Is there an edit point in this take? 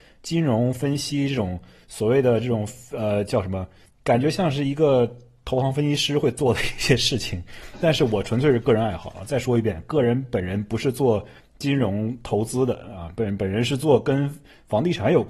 no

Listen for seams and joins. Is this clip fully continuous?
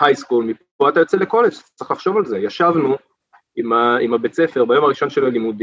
yes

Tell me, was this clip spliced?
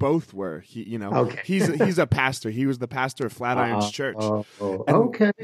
no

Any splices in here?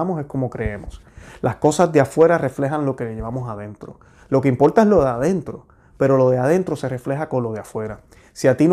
no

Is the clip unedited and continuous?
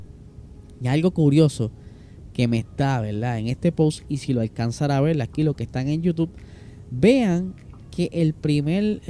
yes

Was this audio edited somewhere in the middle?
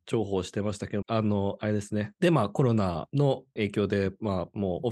yes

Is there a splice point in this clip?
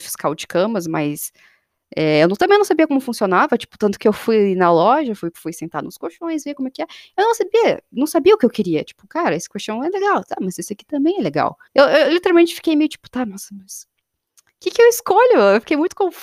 yes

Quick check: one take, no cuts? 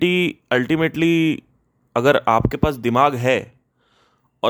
yes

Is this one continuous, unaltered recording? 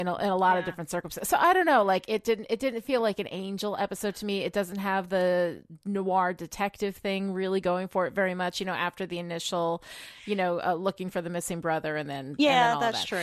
yes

